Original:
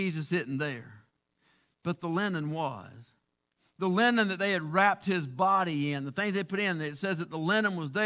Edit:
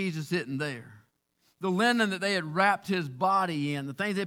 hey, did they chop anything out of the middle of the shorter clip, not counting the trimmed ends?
yes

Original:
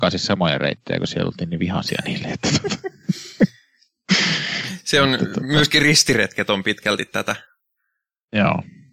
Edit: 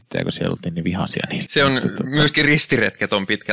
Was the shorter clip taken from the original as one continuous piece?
no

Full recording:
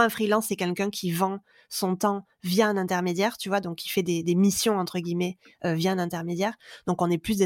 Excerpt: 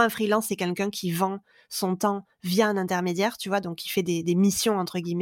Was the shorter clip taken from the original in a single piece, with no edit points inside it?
yes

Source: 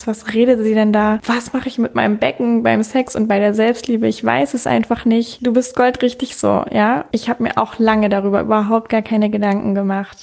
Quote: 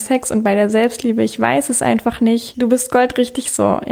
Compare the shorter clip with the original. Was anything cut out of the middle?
no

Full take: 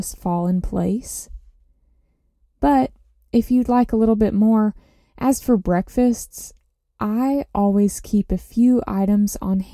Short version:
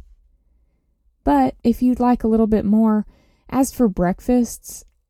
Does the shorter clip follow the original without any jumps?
no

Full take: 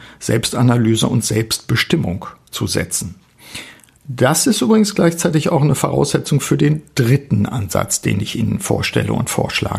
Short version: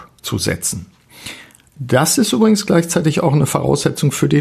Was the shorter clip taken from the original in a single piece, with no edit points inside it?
yes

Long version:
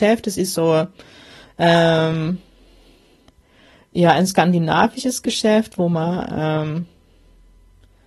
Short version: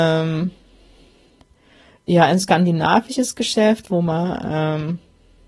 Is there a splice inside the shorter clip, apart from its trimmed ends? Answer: no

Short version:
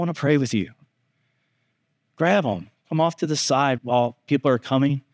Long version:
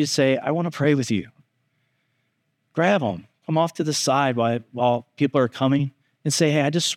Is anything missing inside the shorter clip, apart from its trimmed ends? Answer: yes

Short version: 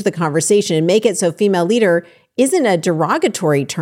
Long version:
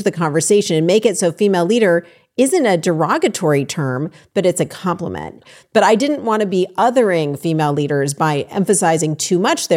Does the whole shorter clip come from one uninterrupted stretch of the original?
yes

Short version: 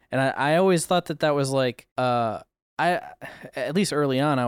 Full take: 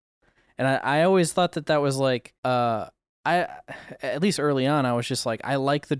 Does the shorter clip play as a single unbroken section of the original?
yes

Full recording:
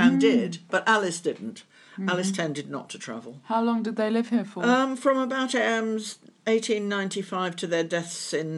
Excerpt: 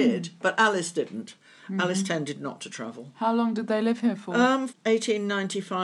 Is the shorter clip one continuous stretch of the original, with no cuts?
no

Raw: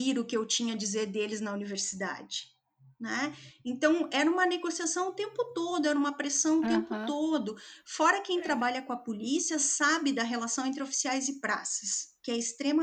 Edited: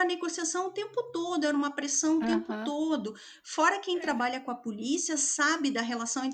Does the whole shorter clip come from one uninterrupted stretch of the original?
yes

